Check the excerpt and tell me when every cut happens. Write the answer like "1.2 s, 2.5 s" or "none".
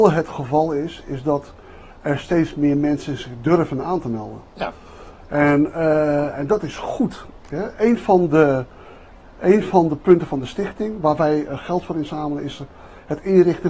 none